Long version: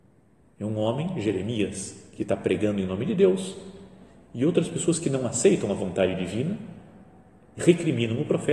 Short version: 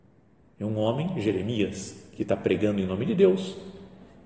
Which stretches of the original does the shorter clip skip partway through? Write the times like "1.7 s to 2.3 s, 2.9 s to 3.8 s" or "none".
none